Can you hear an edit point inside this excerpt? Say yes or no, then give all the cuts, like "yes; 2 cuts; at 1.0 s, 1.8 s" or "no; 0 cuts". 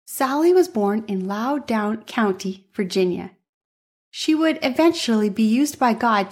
no; 0 cuts